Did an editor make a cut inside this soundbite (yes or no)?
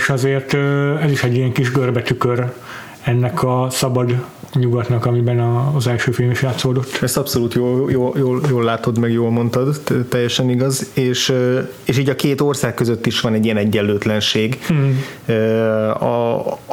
no